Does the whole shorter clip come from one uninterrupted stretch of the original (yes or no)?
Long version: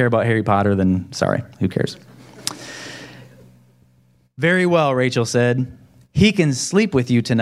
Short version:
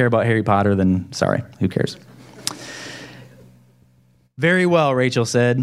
yes